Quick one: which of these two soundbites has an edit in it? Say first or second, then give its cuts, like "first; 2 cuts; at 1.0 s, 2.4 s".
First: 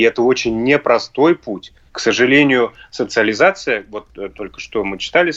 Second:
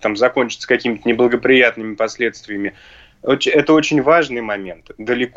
first; 1 cut; at 1.9 s